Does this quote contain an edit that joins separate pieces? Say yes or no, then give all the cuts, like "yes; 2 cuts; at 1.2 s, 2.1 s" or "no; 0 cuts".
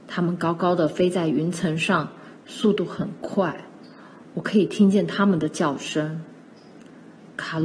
no; 0 cuts